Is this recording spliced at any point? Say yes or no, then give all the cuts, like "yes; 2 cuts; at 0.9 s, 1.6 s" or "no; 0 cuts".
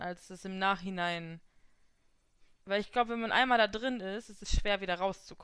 no; 0 cuts